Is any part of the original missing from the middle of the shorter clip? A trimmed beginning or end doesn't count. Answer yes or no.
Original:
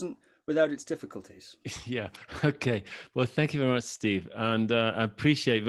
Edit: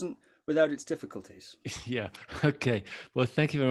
no